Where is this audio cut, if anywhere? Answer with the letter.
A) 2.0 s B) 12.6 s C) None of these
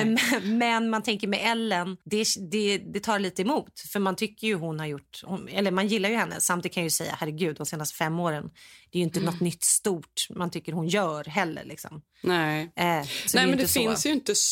A